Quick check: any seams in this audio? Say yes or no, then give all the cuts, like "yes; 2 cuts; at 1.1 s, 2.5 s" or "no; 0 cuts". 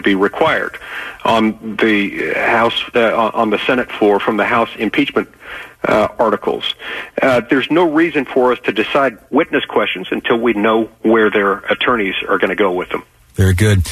no; 0 cuts